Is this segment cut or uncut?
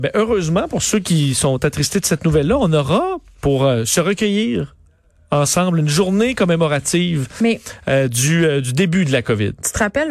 uncut